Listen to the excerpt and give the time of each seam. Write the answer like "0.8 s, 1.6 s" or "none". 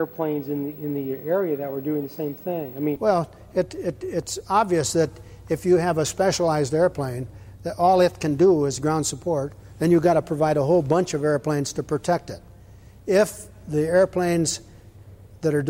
none